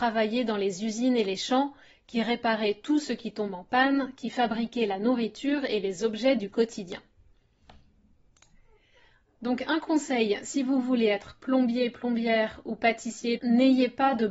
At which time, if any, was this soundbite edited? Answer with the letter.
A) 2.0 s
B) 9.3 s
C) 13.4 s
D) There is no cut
C